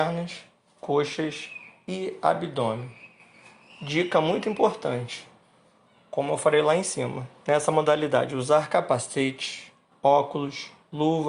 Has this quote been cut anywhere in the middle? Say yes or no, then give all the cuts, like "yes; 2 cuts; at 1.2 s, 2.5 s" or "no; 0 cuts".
no; 0 cuts